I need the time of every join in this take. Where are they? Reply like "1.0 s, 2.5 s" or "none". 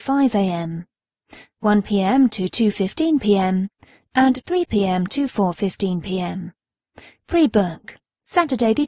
none